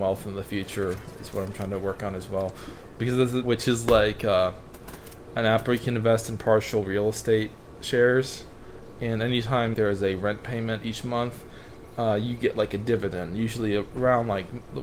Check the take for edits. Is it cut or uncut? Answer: cut